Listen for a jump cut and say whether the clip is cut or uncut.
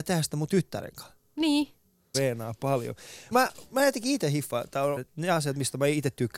cut